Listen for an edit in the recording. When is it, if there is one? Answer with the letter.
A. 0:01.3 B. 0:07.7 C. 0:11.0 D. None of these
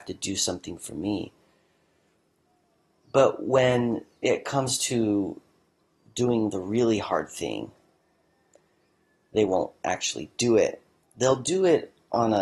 C